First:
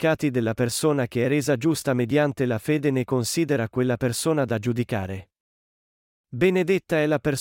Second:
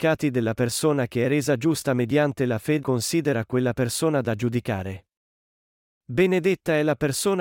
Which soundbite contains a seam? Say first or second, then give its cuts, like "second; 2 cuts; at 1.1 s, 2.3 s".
second; 1 cut; at 2.8 s